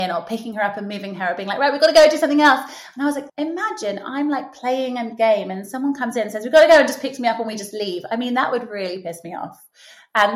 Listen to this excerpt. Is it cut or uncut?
cut